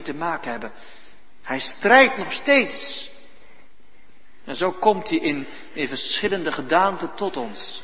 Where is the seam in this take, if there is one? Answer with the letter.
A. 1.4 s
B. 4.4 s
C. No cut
C